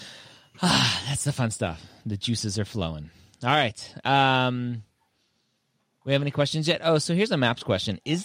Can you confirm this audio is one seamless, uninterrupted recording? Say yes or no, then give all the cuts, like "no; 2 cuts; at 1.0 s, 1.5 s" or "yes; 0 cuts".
yes; 0 cuts